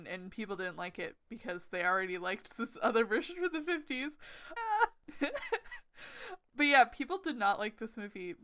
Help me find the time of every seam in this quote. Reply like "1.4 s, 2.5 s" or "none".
4.6 s